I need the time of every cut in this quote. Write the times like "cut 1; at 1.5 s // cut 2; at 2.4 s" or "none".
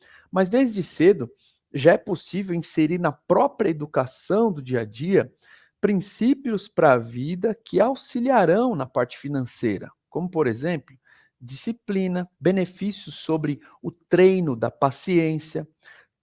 cut 1; at 12.4 s

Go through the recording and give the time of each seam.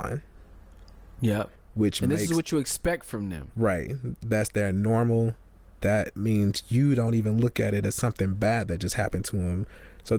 none

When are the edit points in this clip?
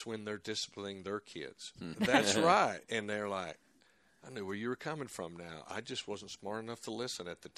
cut 1; at 1.9 s

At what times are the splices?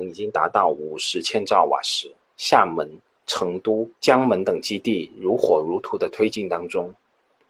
cut 1; at 2.3 s // cut 2; at 4.0 s

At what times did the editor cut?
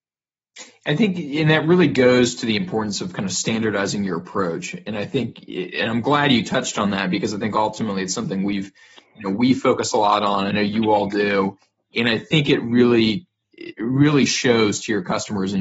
none

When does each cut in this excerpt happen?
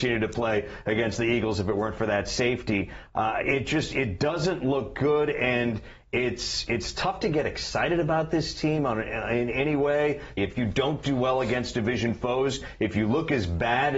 cut 1; at 3.4 s // cut 2; at 10.4 s

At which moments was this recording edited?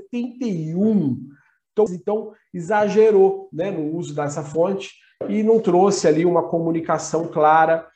cut 1; at 1.9 s

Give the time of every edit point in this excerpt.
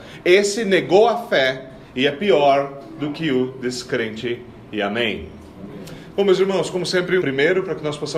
cut 1; at 6.1 s // cut 2; at 7.2 s

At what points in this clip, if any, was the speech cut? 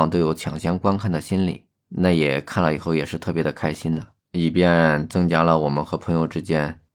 cut 1; at 1.8 s // cut 2; at 4.2 s

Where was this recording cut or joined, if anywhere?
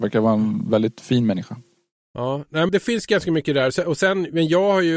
cut 1; at 2.7 s

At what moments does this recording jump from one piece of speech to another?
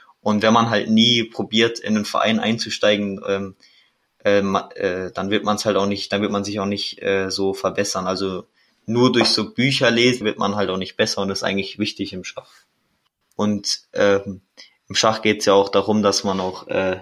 cut 1; at 10.2 s // cut 2; at 13.2 s

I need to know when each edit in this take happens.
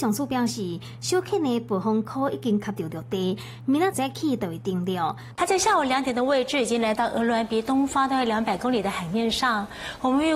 cut 1; at 3.9 s // cut 2; at 5.3 s

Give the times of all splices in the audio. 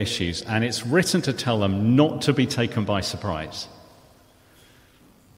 none

